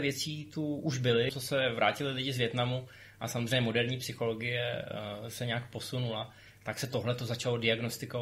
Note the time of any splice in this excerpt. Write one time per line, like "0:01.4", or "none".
0:01.3